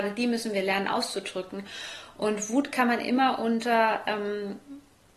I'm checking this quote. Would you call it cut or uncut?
uncut